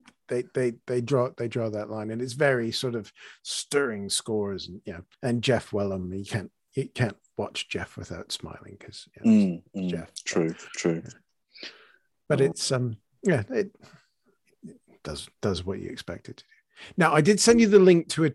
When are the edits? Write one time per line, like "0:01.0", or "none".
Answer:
0:05.1